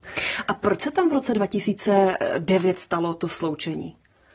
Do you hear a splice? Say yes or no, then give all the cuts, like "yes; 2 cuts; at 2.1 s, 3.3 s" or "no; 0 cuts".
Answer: no; 0 cuts